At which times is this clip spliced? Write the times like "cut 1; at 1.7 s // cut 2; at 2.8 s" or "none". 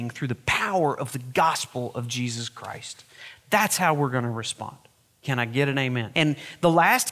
cut 1; at 6.1 s